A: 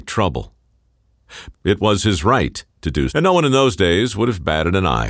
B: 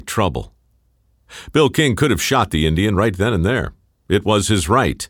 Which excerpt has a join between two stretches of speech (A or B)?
A